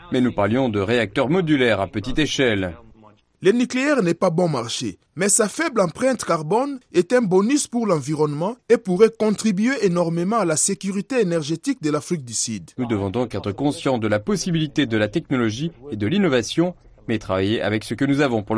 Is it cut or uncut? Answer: cut